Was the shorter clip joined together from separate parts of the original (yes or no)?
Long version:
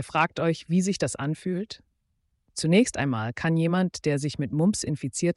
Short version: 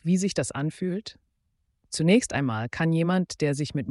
no